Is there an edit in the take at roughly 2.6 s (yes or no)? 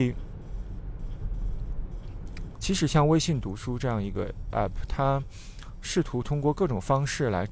yes